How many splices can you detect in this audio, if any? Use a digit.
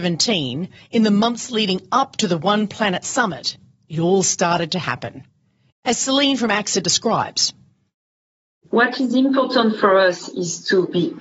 1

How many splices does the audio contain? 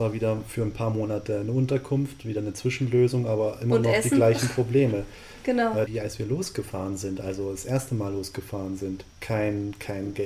2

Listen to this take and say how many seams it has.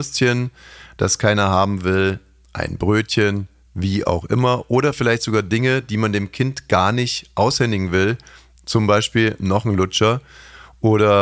0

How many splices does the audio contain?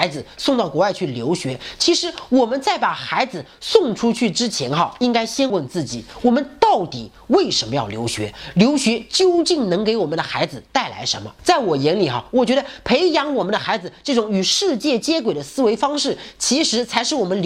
1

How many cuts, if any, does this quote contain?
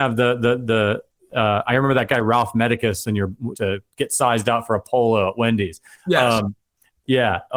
1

